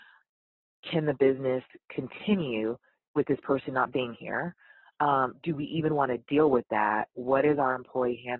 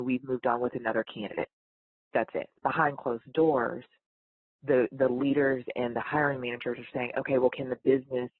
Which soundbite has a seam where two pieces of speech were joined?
second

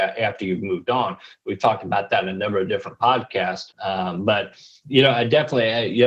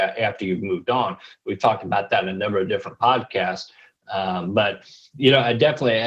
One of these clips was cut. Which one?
first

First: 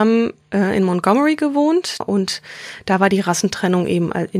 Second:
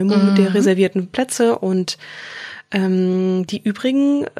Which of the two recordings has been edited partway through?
first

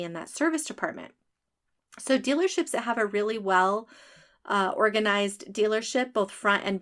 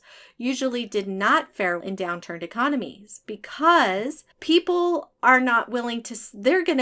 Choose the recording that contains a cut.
second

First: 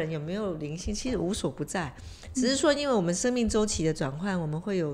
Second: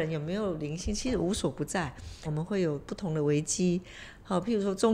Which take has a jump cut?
second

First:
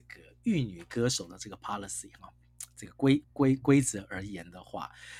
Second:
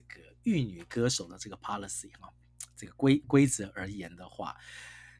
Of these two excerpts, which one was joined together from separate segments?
second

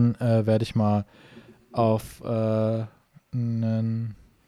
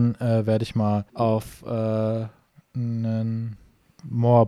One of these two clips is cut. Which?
second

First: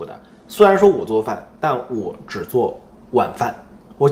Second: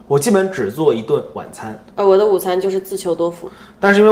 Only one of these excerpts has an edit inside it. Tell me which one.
second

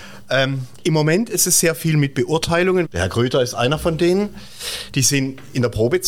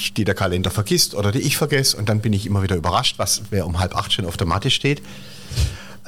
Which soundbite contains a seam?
first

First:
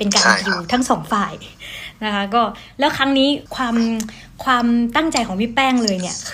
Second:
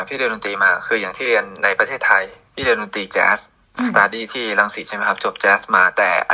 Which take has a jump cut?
first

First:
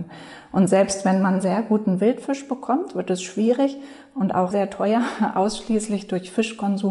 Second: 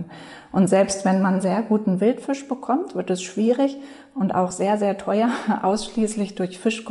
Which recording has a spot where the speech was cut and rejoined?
first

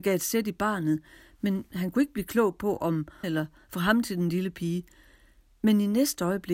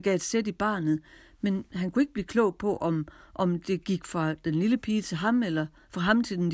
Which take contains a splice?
first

